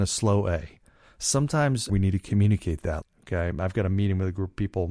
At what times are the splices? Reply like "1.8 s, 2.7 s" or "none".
1.9 s, 3.0 s